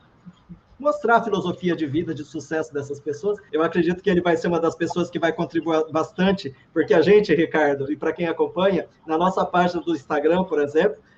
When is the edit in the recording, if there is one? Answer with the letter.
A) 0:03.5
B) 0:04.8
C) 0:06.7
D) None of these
A